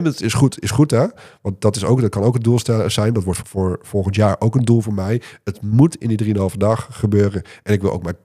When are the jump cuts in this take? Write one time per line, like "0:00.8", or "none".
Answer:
0:03.4